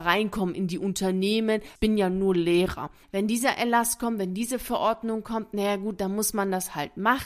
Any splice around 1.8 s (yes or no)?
yes